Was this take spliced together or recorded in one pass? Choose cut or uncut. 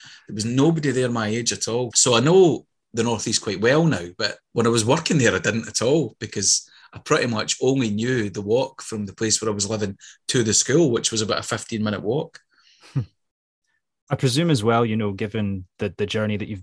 cut